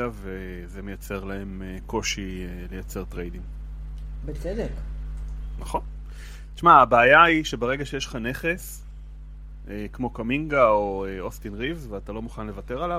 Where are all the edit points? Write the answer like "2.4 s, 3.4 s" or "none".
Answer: none